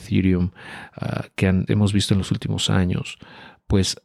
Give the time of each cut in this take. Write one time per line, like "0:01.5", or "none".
0:01.7